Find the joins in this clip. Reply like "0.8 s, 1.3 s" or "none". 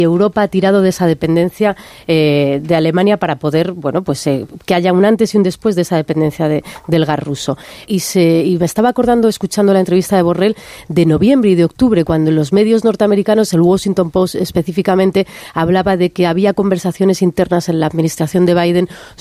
7.8 s

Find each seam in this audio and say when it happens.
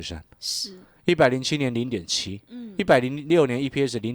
none

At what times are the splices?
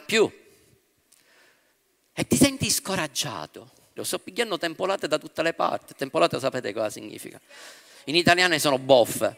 4.0 s

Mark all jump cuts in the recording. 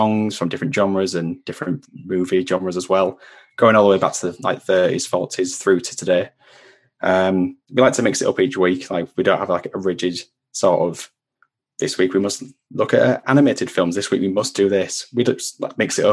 none

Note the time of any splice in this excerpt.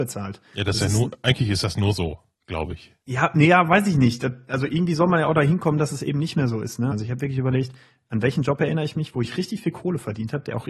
6.9 s

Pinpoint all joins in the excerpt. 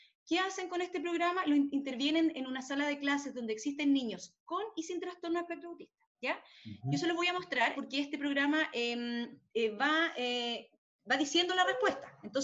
7.7 s

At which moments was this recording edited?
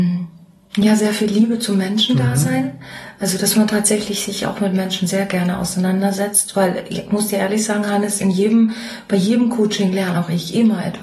none

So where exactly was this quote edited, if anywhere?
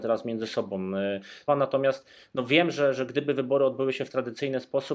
1.5 s

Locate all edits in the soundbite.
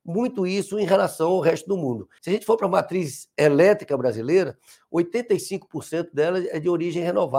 2.2 s

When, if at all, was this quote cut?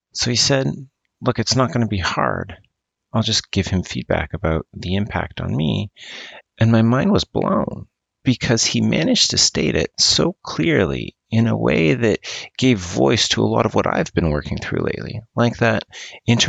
6.4 s

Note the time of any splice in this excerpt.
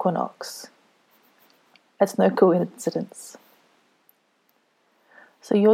none

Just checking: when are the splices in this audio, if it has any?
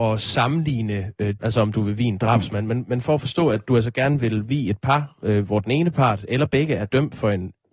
1.4 s

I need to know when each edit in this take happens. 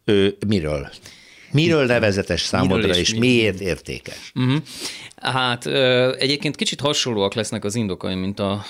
none

